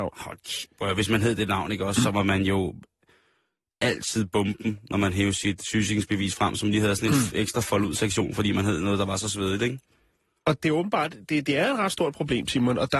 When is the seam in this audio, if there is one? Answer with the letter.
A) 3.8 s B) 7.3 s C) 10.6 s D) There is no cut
C